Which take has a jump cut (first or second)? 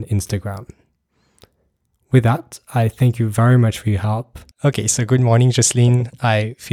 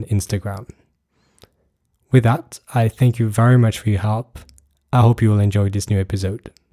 first